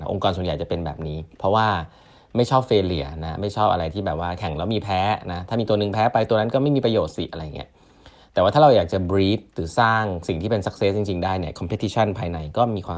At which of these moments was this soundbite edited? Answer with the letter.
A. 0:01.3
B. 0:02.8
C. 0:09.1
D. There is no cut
A